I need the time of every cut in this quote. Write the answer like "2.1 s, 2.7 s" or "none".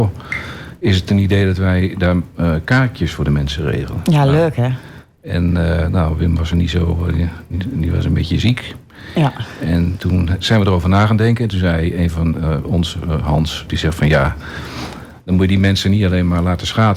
6.5 s, 13.7 s